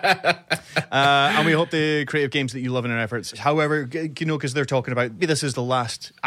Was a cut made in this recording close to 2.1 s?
no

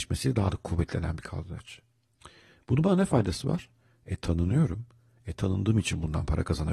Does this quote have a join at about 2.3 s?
no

